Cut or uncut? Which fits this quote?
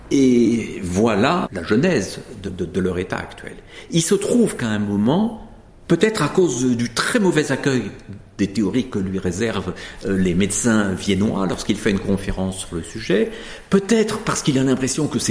cut